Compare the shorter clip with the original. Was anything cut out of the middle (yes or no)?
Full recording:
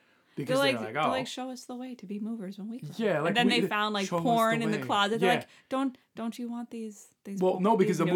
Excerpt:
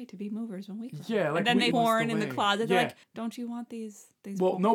yes